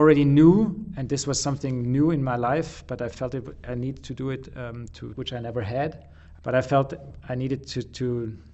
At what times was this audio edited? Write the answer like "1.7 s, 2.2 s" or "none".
5.1 s, 6.4 s